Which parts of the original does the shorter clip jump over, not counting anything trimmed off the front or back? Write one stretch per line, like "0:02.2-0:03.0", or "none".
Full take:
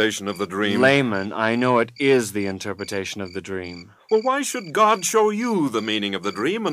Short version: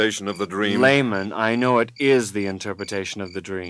none